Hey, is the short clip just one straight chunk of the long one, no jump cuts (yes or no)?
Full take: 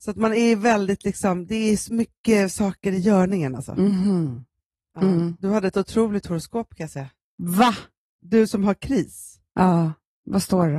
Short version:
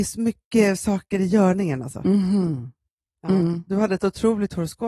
yes